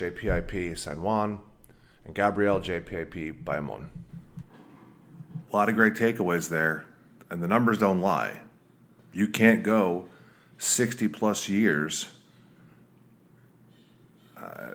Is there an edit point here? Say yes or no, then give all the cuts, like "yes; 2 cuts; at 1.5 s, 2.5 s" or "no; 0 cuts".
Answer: yes; 2 cuts; at 5.5 s, 9.0 s